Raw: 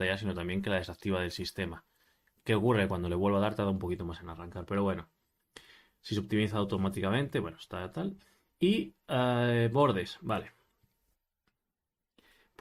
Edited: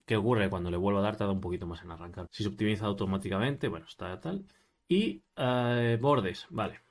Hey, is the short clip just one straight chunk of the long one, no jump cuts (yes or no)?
no